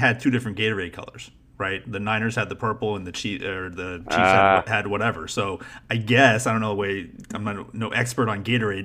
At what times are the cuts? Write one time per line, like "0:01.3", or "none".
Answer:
none